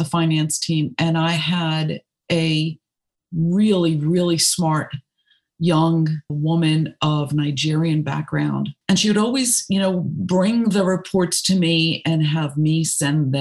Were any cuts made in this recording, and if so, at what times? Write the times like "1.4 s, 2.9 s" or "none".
6.3 s, 8.8 s

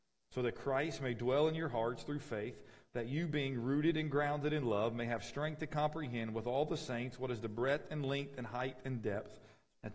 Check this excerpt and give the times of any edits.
none

